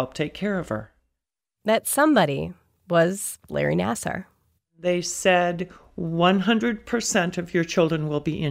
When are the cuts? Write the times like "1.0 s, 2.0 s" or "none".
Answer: 4.6 s